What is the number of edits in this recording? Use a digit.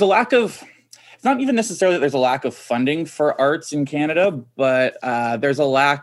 0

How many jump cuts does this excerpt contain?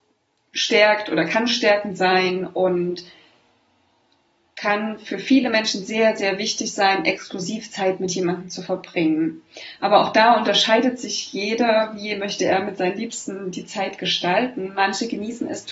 0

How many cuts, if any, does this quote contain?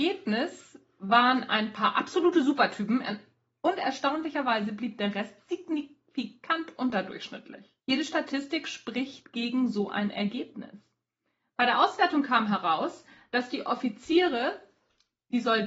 1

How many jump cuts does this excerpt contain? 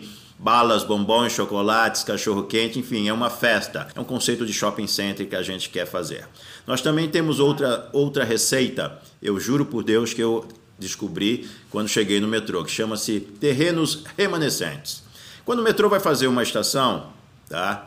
1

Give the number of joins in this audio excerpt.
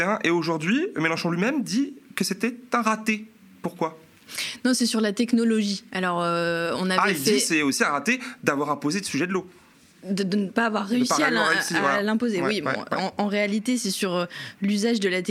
0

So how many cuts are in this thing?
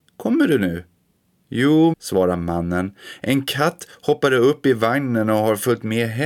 1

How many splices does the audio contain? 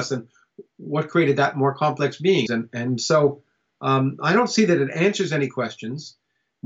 1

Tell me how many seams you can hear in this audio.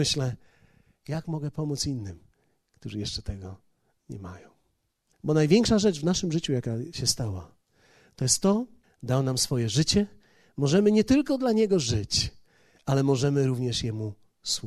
2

